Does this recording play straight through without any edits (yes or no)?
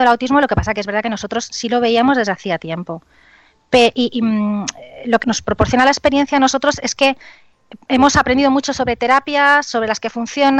no